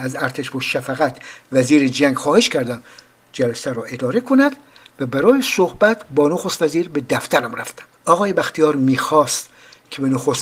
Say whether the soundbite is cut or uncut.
cut